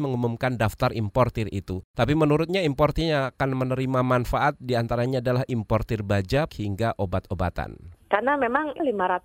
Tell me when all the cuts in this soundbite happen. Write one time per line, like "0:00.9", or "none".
0:06.5
0:08.0